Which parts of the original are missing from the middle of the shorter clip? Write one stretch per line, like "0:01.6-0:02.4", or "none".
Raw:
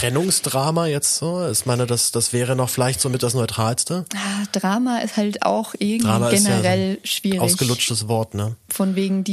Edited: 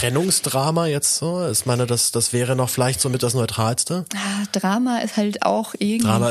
none